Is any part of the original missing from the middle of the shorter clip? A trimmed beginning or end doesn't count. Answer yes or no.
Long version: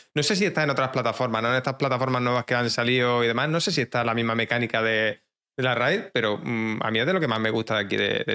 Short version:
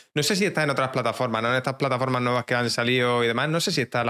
no